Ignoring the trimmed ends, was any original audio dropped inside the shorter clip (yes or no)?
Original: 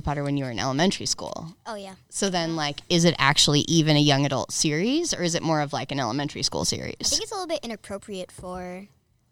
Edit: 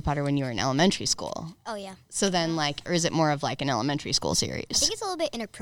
yes